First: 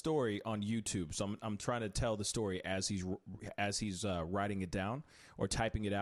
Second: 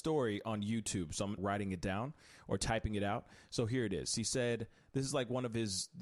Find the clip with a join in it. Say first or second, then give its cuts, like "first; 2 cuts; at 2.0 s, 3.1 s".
second; 1 cut; at 1.4 s